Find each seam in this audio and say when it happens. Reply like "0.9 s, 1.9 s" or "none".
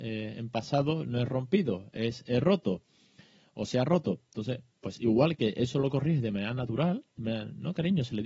4.7 s